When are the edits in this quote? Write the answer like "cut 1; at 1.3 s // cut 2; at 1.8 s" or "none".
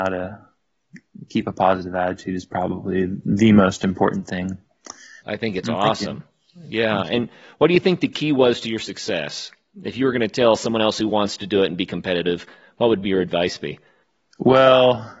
cut 1; at 5.2 s